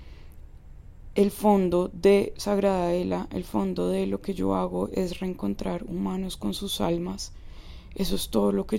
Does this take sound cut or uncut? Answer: uncut